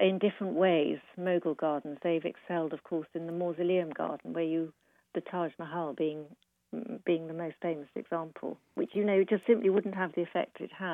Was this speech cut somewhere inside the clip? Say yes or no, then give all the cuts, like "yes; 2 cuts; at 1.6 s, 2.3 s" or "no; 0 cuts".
no; 0 cuts